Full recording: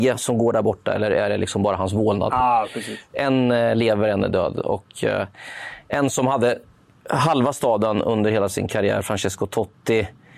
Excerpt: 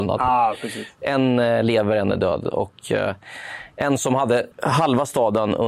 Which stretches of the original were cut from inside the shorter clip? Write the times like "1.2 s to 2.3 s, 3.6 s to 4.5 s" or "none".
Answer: 6.6 s to 7.0 s